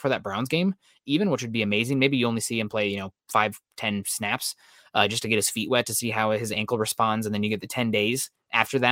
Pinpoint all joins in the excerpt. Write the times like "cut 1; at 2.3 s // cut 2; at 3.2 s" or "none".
none